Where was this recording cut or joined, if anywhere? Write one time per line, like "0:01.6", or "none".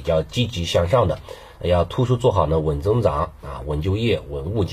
none